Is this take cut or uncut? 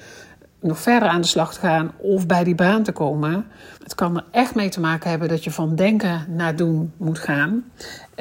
cut